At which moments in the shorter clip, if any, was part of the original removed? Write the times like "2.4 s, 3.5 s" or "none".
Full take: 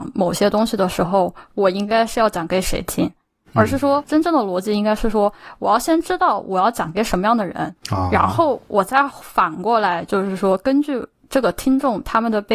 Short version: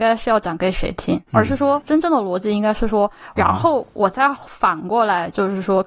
1.3 s, 3.4 s